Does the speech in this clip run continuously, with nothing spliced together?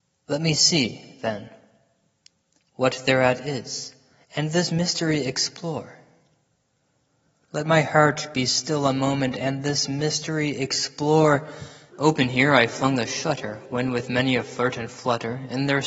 no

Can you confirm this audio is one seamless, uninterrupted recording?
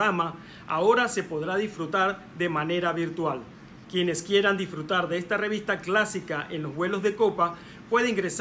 no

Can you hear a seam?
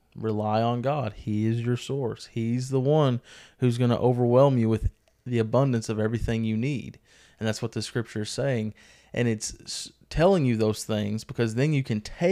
no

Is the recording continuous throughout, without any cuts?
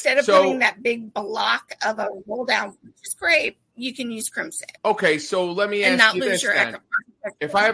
no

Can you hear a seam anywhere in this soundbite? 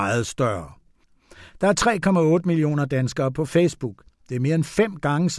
no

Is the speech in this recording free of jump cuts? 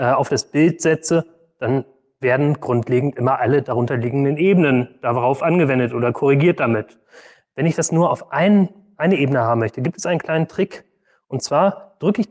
yes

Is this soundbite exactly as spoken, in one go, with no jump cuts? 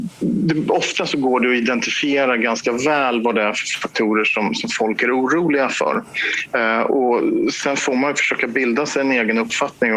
yes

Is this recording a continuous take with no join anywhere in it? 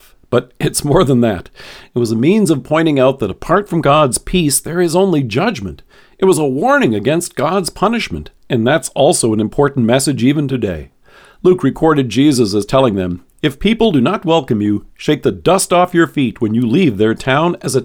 yes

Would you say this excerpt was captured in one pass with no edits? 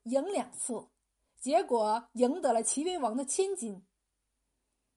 yes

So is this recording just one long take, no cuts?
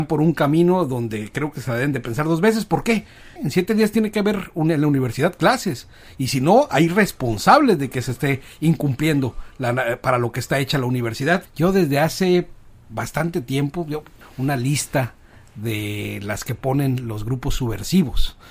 no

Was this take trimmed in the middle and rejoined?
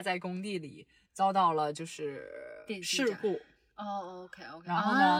no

